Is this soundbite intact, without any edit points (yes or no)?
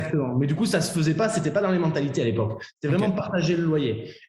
yes